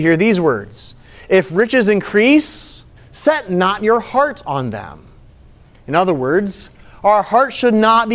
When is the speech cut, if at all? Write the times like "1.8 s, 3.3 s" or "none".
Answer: 3.0 s